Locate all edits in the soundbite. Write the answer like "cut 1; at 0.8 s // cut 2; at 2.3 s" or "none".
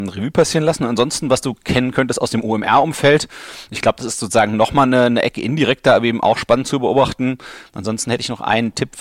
cut 1; at 7.7 s